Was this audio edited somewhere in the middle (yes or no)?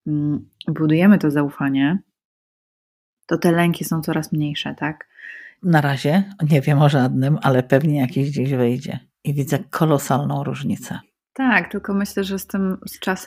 yes